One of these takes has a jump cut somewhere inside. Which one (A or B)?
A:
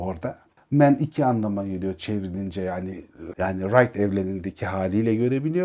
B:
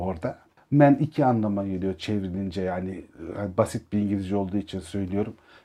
A